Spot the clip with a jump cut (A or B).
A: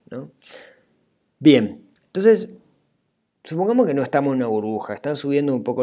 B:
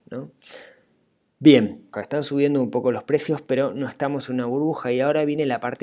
B